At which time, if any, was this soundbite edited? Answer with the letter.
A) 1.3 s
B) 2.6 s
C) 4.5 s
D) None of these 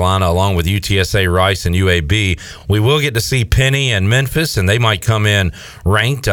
D